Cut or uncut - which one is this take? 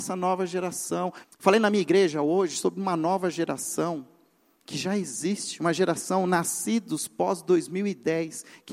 cut